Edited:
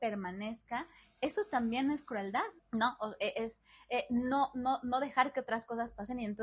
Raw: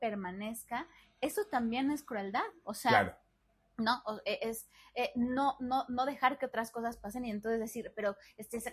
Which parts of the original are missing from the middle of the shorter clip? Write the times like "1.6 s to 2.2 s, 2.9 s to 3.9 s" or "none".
2.6 s to 3.6 s